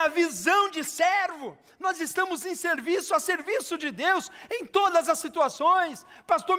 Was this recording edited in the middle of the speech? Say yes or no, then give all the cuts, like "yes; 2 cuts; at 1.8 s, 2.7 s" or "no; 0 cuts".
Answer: no; 0 cuts